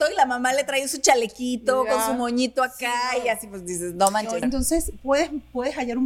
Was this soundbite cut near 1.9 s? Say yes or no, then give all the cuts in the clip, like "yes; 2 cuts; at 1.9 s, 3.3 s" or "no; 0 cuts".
no; 1 cut; at 4.4 s